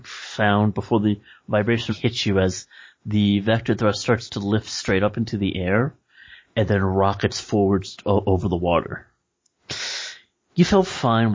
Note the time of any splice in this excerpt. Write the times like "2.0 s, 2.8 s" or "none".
1.9 s